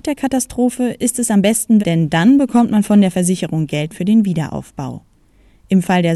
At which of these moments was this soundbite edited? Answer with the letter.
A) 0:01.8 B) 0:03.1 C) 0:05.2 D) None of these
A